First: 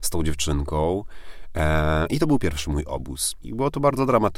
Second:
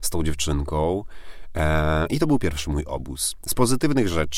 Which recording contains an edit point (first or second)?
first